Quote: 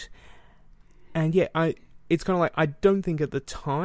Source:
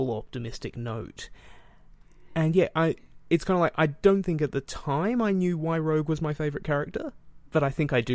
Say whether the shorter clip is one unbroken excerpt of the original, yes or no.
yes